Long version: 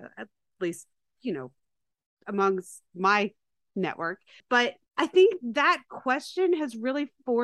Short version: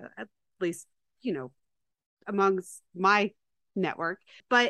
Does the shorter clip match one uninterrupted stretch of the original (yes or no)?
yes